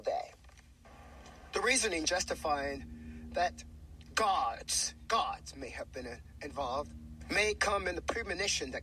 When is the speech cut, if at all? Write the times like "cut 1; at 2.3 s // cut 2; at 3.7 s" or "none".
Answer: cut 1; at 5.1 s